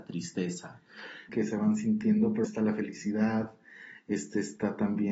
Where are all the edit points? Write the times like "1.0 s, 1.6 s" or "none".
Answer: 1.3 s, 2.4 s